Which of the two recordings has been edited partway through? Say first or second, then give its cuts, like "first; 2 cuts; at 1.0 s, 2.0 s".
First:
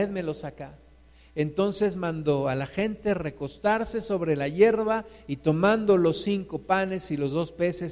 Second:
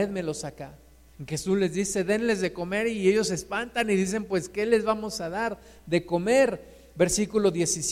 second; 1 cut; at 1.1 s